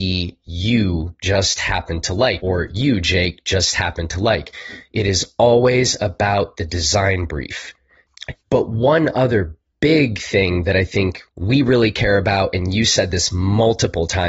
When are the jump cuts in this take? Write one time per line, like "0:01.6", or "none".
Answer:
0:02.4
0:08.4
0:11.3